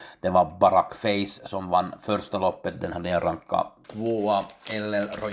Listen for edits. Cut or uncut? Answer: cut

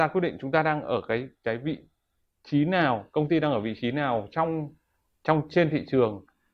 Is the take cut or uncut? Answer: uncut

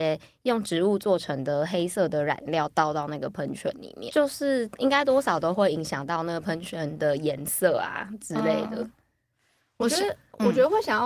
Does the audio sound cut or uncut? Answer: cut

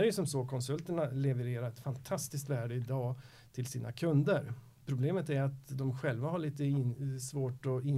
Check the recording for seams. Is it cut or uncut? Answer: cut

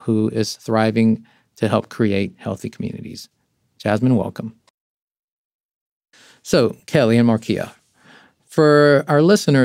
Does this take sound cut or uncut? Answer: uncut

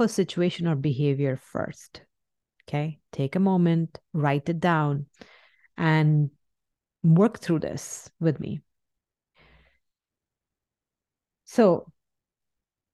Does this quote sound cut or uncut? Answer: uncut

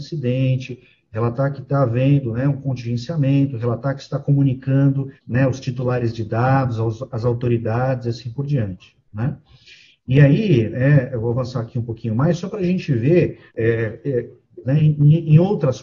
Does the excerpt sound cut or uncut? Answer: cut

